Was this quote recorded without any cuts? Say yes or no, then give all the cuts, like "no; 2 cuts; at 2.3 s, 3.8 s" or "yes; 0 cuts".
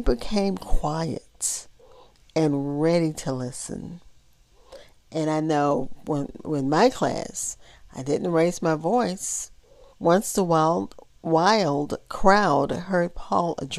no; 2 cuts; at 4.9 s, 9.9 s